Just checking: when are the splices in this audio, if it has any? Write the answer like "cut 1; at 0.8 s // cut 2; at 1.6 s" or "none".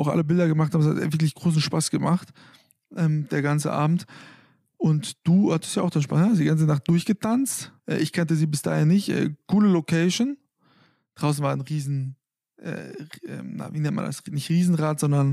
cut 1; at 7.8 s